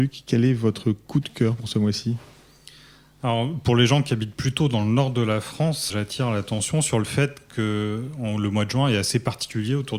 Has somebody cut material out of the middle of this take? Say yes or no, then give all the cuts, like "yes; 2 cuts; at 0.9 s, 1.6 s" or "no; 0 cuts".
yes; 1 cut; at 5.9 s